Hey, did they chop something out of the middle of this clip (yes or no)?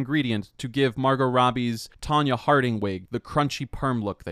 no